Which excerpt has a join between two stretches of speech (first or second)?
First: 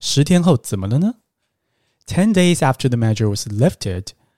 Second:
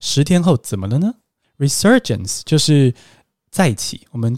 second